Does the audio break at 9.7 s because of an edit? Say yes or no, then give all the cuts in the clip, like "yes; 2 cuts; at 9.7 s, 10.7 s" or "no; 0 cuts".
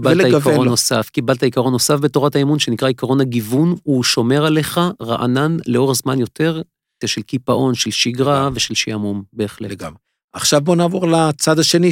no; 1 cut; at 7.0 s